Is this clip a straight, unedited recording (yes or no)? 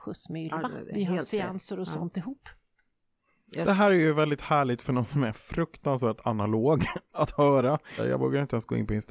no